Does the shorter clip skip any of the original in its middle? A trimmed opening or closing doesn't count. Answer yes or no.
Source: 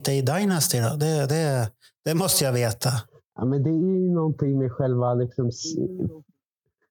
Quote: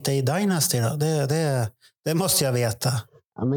no